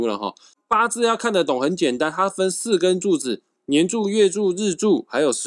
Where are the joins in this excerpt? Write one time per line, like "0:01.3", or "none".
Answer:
none